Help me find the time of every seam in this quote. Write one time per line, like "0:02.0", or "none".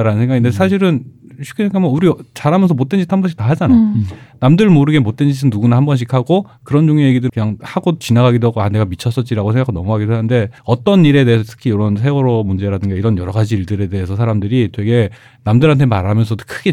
0:07.3
0:10.6